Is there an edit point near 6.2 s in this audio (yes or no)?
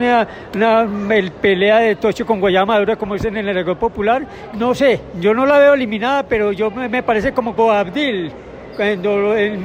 no